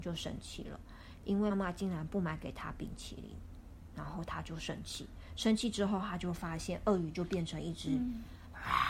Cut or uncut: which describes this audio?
cut